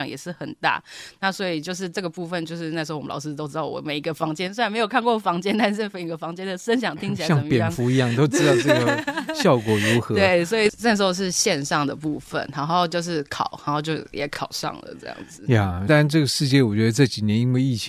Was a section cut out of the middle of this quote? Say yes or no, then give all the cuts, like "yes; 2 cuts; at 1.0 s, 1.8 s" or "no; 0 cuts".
no; 0 cuts